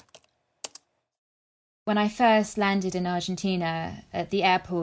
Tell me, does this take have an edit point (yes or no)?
no